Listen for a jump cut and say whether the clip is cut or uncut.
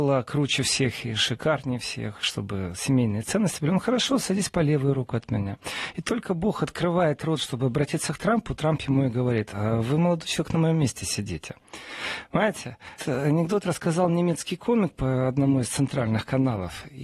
cut